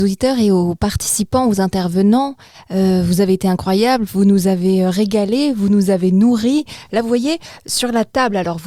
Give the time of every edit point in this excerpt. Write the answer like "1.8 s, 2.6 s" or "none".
none